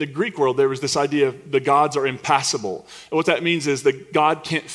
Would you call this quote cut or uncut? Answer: uncut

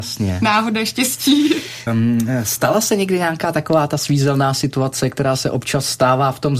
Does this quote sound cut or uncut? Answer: cut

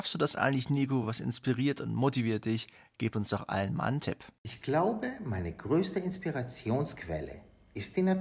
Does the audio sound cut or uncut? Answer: uncut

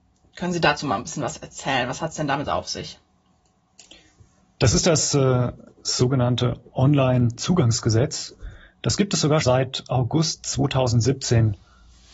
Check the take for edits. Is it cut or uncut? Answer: cut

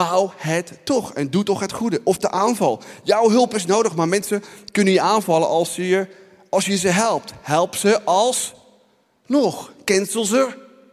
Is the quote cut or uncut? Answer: uncut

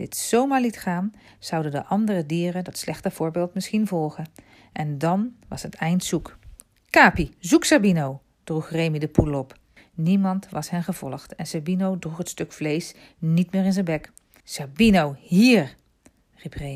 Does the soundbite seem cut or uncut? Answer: cut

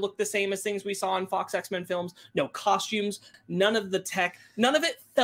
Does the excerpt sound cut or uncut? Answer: cut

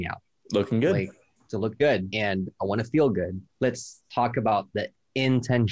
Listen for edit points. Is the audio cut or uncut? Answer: cut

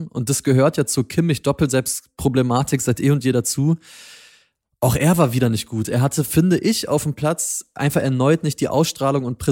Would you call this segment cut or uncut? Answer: uncut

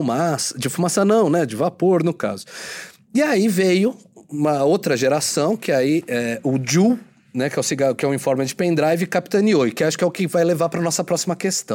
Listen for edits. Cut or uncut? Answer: uncut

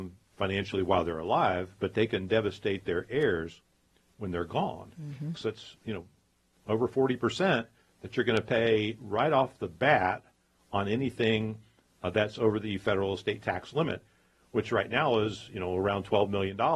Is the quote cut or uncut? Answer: cut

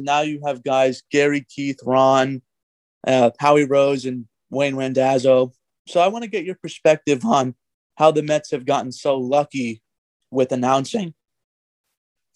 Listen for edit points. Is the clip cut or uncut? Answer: uncut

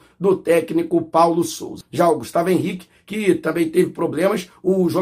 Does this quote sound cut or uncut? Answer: cut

